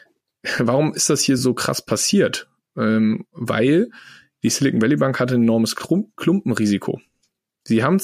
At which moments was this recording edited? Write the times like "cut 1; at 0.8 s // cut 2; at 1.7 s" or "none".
none